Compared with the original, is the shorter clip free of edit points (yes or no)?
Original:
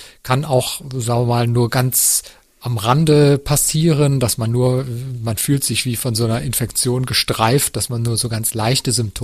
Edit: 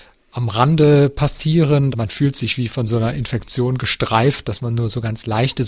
no